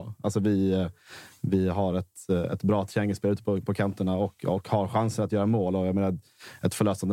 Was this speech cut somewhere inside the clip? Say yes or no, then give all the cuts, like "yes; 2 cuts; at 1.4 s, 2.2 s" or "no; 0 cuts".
no; 0 cuts